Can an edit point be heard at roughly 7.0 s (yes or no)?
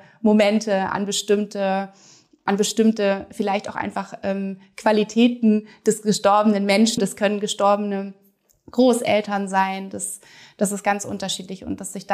yes